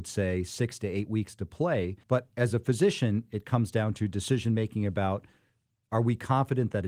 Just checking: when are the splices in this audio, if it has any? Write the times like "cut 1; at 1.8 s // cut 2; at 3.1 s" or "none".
cut 1; at 2.0 s

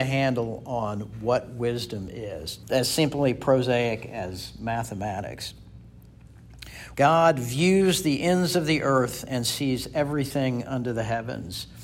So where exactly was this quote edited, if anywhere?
cut 1; at 2.6 s // cut 2; at 6.9 s

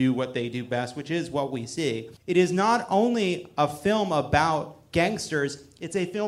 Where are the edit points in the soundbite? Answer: cut 1; at 2.2 s

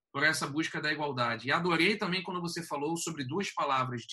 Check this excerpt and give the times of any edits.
none

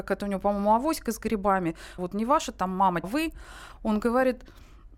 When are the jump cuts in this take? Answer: cut 1; at 2.0 s // cut 2; at 3.0 s

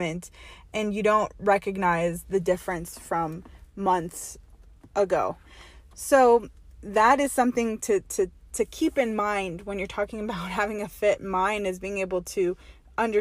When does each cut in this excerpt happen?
none

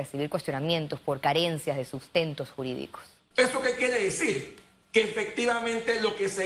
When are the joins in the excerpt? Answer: cut 1; at 3.3 s

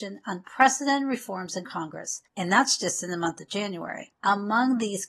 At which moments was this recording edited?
none

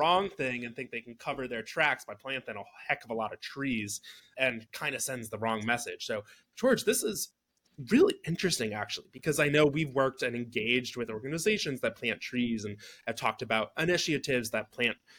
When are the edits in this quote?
none

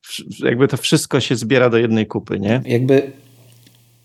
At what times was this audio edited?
cut 1; at 2.6 s

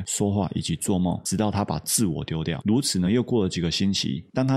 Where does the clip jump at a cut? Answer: none

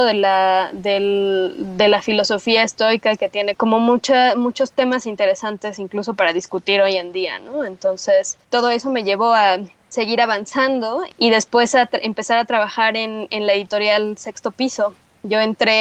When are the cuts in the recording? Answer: none

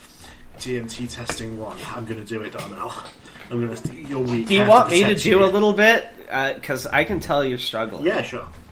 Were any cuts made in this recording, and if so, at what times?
none

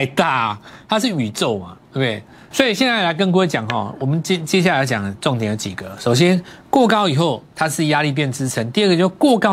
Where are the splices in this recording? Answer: cut 1; at 2.5 s

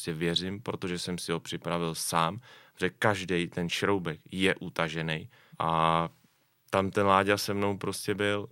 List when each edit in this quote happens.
cut 1; at 5.5 s

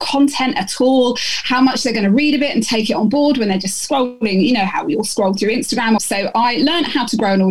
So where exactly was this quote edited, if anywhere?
cut 1; at 6.0 s

